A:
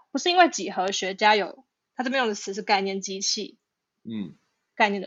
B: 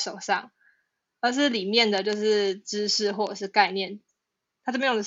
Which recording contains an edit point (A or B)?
A